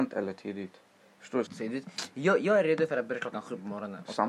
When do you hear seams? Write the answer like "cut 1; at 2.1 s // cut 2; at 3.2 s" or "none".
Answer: cut 1; at 1.5 s